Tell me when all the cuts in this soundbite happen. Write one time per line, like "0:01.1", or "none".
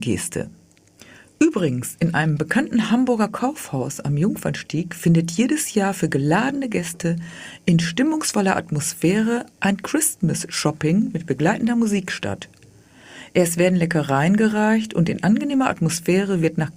none